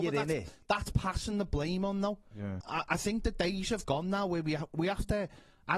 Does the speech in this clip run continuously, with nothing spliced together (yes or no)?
no